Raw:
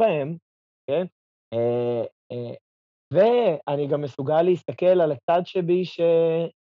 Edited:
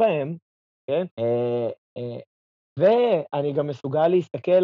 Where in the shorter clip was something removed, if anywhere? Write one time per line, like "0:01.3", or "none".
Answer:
0:01.1